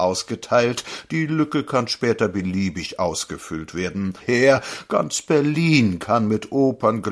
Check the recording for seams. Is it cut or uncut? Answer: cut